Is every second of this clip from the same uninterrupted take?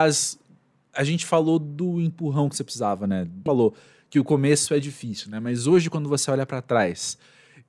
no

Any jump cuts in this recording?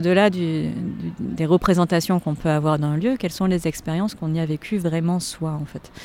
no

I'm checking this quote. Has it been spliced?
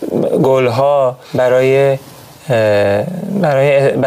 yes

